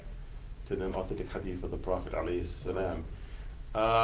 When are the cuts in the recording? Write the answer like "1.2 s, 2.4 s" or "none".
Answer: 0.9 s